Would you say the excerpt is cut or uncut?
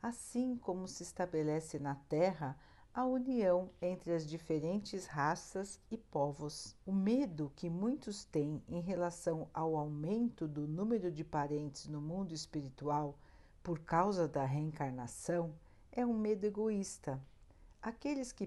cut